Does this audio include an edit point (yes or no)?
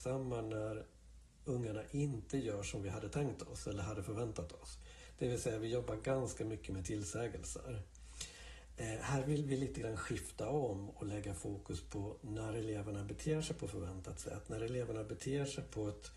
no